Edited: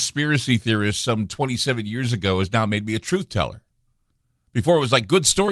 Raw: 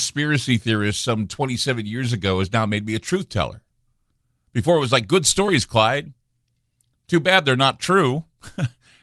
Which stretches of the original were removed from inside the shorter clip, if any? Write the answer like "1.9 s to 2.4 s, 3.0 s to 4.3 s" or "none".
none